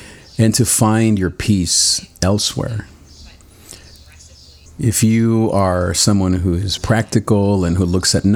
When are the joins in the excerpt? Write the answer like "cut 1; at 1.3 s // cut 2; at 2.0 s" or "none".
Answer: cut 1; at 4.7 s // cut 2; at 6.8 s